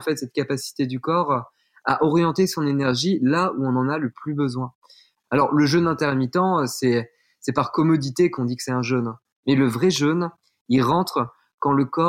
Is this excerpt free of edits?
no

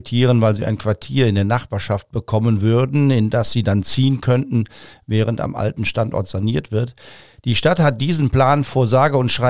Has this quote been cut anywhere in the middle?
no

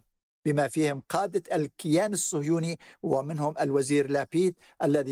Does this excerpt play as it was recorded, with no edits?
yes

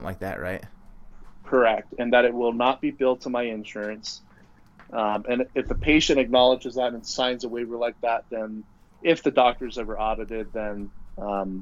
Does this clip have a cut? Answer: no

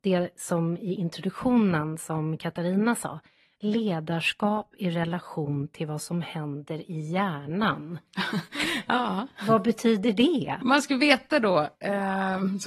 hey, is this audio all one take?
yes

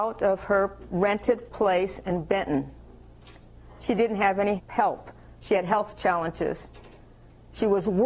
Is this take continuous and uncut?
no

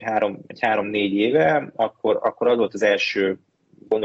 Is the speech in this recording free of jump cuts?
yes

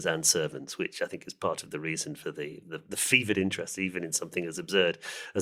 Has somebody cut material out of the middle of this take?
no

